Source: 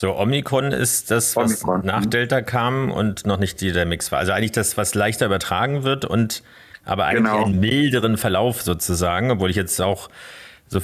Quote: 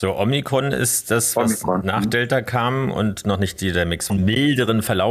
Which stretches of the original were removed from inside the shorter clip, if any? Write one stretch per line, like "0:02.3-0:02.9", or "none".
0:04.1-0:07.4